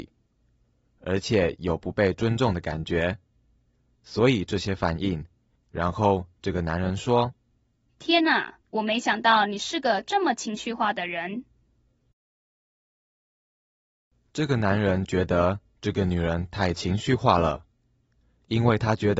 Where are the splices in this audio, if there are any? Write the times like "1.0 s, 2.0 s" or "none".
5.6 s, 8.6 s